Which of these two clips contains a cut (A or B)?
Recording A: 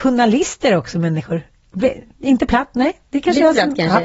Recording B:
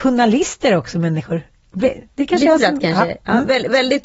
B